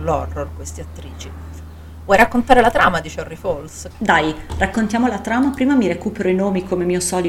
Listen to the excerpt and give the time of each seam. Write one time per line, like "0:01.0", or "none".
0:03.9